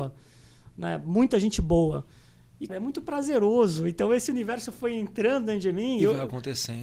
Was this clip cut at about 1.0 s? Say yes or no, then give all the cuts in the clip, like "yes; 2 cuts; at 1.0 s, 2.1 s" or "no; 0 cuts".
no; 1 cut; at 2.7 s